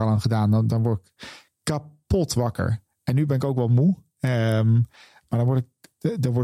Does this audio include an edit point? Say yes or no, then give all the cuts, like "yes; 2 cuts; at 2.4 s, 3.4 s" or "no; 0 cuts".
no; 0 cuts